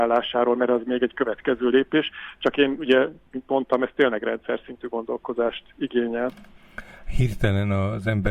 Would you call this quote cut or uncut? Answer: uncut